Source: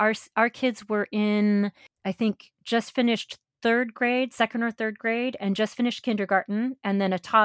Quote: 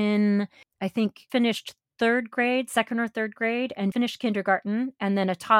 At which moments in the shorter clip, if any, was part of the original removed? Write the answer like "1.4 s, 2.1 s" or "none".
1.3 s, 3.9 s